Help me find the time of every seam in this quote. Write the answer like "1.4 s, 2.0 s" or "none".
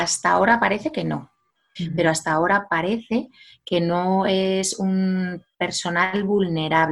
1.8 s